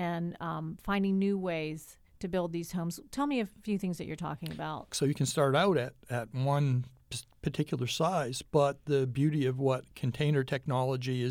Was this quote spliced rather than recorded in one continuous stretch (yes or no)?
yes